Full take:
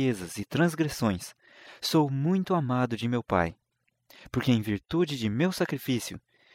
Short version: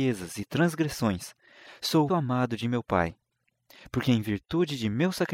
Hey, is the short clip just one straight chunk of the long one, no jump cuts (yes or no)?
no